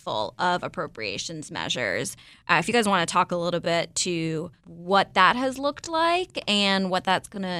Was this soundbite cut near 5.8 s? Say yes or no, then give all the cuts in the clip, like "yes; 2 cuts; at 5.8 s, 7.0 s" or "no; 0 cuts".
no; 1 cut; at 4.6 s